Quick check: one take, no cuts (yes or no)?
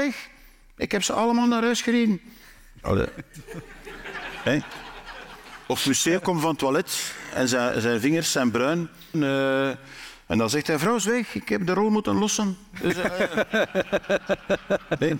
no